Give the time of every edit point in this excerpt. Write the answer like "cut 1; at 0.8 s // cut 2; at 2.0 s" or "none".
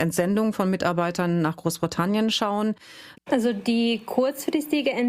cut 1; at 3.1 s